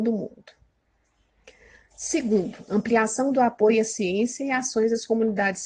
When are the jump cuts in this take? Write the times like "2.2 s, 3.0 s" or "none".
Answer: none